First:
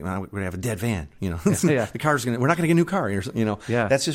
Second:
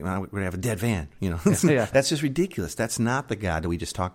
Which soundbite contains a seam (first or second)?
second